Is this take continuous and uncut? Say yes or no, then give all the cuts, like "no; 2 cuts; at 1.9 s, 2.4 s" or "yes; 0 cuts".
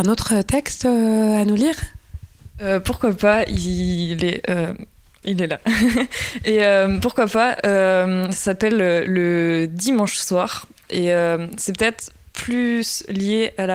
no; 1 cut; at 5.2 s